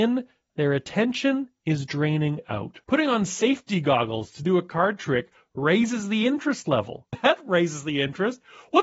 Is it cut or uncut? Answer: cut